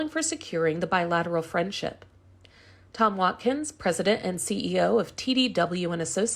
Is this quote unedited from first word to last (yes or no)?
yes